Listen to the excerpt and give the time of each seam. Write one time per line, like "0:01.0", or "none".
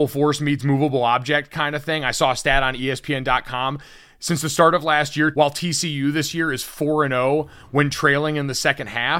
0:05.3